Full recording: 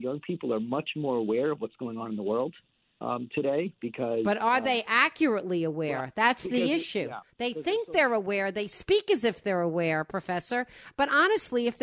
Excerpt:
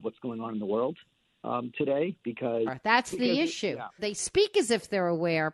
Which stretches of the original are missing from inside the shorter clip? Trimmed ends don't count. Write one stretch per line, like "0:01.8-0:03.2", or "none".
0:04.2-0:06.0
0:07.3-0:08.5